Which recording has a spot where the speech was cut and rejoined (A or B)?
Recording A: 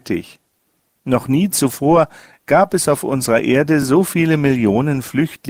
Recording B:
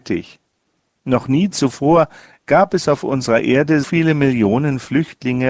B